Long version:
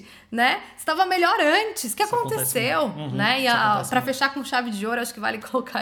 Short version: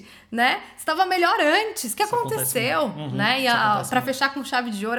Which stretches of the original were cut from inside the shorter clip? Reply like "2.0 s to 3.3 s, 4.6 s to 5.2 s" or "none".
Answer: none